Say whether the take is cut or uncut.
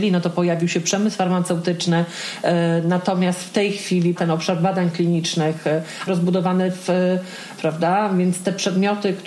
cut